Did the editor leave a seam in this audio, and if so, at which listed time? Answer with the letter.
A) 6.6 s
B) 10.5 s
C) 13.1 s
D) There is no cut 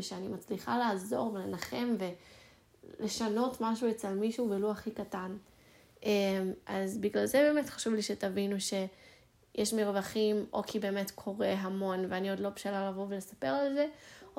D